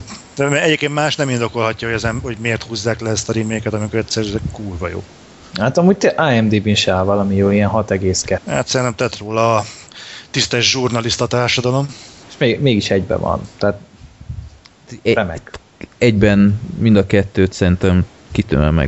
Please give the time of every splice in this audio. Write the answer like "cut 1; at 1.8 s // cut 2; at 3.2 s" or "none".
cut 1; at 8.4 s // cut 2; at 12.2 s